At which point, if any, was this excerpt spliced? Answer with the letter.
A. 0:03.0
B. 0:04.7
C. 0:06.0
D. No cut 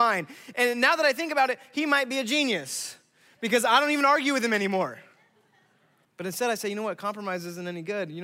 C